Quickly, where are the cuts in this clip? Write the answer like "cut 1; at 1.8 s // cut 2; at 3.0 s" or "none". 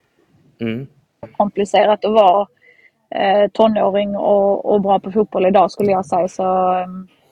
cut 1; at 1.2 s

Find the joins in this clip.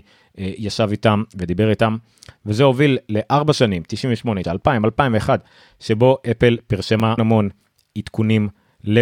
cut 1; at 4.4 s // cut 2; at 7.2 s

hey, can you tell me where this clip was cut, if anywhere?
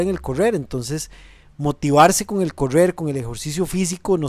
none

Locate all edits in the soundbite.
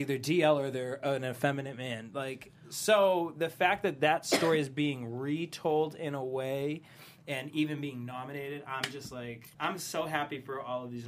cut 1; at 9.5 s

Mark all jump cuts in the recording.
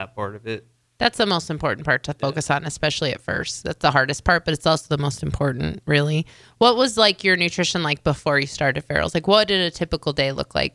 none

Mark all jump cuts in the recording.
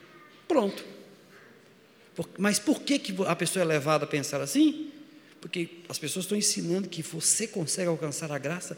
none

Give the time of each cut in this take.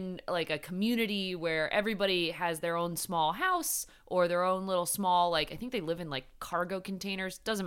none

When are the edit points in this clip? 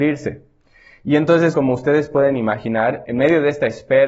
cut 1; at 1.5 s // cut 2; at 3.1 s

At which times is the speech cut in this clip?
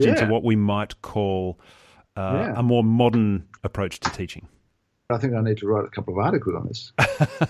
cut 1; at 5.1 s

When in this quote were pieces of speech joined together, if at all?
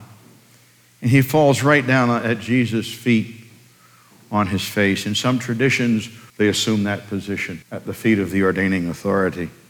cut 1; at 6.3 s // cut 2; at 7.6 s

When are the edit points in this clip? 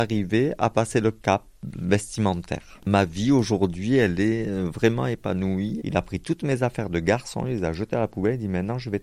cut 1; at 5.8 s

